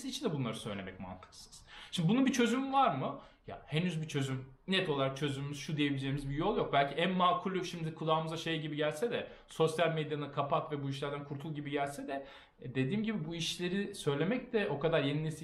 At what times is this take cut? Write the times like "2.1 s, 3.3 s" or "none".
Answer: none